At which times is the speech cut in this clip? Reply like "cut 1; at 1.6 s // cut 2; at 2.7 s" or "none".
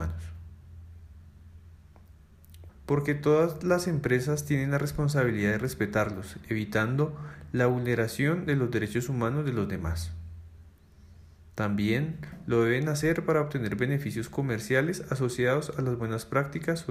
cut 1; at 2.7 s